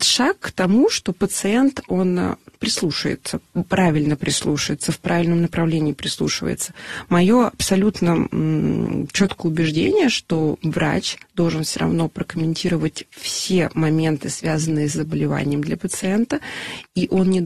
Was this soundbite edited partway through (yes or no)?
no